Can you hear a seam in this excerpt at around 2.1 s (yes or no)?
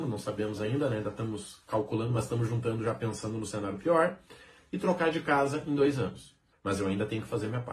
no